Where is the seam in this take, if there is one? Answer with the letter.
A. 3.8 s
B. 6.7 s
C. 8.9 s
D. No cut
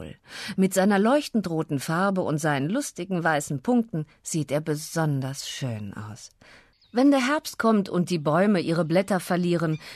B